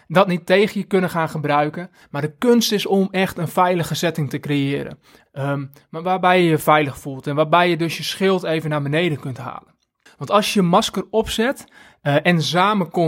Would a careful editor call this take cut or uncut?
cut